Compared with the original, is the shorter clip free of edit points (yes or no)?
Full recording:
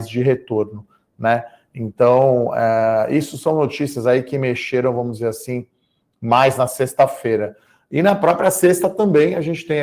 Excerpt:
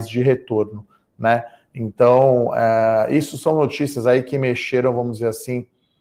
yes